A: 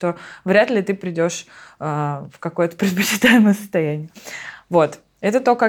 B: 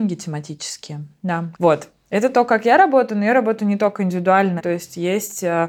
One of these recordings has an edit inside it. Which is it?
B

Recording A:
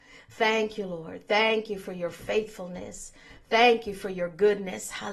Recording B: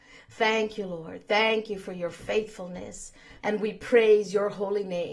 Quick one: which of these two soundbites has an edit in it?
B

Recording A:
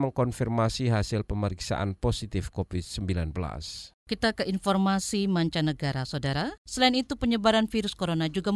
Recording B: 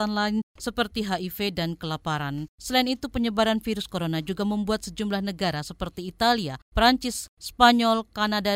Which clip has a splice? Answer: A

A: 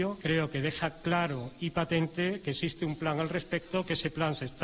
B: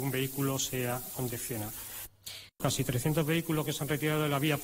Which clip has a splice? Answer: B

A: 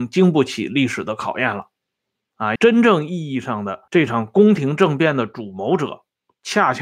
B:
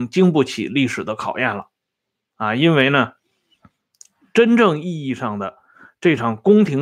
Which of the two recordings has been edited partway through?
A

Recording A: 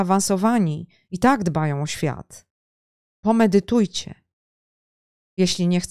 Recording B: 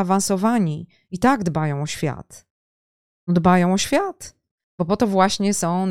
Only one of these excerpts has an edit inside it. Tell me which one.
A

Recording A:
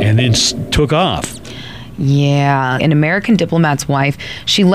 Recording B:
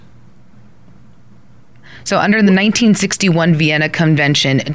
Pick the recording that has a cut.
A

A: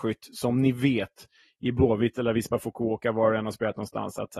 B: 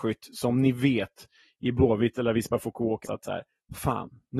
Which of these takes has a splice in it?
B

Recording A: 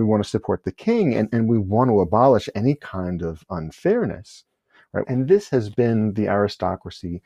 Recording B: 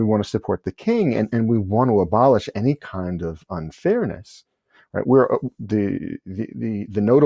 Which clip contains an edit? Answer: A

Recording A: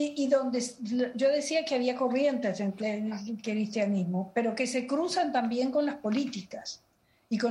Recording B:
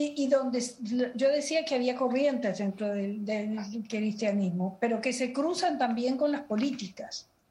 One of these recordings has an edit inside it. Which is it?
A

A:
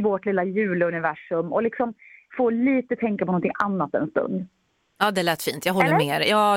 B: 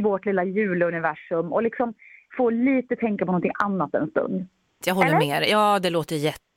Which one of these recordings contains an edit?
B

